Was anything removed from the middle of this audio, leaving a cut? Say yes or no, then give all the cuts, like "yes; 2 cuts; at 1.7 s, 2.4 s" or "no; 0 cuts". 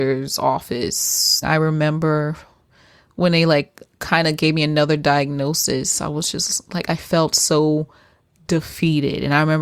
yes; 1 cut; at 1.4 s